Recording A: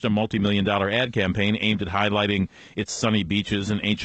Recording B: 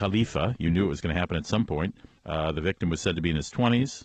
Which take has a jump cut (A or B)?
B